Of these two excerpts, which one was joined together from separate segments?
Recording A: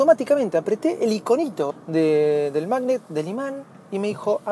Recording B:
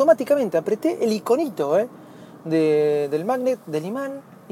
A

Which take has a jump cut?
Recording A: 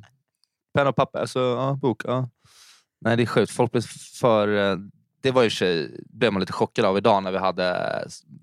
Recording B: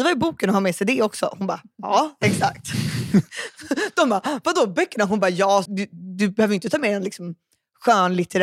B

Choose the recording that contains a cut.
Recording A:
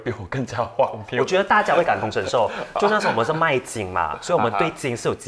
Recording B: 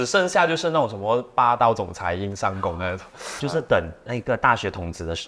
B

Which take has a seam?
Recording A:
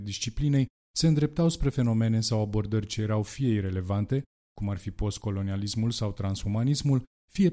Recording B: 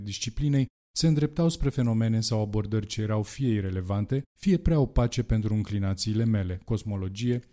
B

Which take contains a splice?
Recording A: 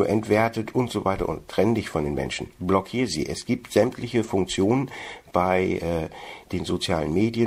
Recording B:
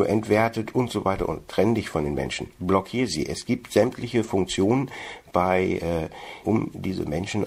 B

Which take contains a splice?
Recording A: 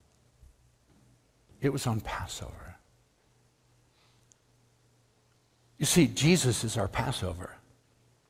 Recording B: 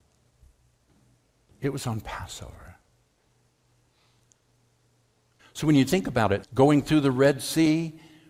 B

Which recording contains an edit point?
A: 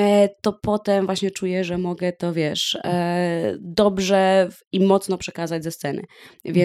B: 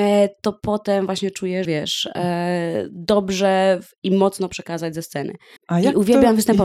B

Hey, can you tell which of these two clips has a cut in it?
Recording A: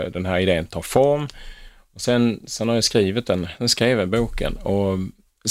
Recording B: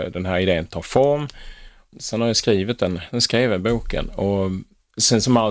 B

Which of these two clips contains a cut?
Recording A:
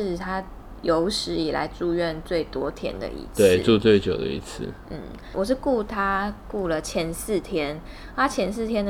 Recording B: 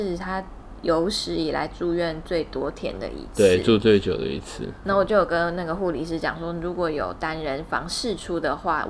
B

